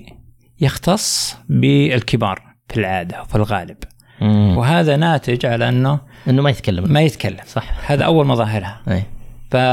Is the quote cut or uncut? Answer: cut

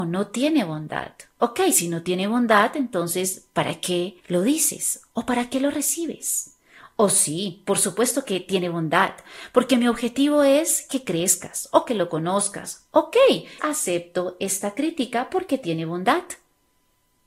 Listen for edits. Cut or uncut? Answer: cut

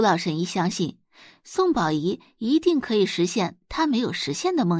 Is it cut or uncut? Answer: uncut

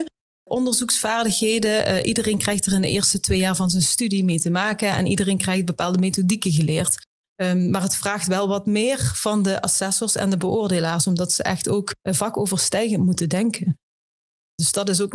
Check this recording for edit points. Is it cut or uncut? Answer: cut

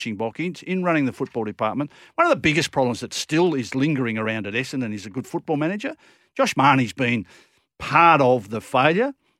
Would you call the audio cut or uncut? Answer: uncut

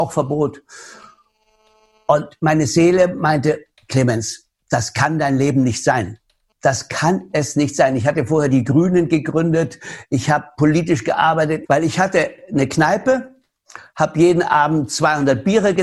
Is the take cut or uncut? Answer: cut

